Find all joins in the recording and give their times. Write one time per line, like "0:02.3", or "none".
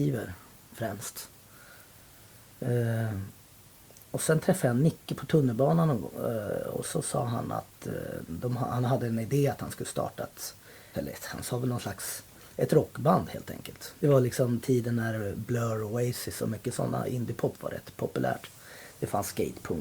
0:10.9
0:14.0